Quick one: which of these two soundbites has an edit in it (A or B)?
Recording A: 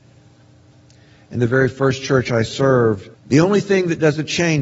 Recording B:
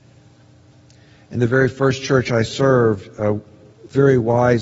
A